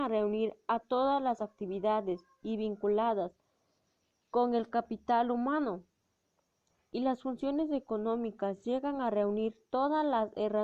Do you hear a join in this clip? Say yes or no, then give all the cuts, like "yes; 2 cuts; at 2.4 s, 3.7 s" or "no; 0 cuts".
no; 0 cuts